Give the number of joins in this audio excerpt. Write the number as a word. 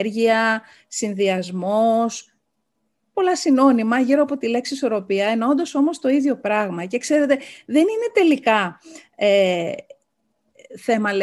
zero